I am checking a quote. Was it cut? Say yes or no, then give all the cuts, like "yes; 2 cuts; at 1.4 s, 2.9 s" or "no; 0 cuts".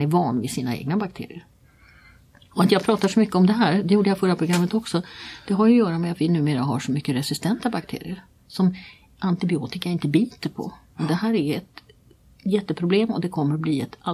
no; 0 cuts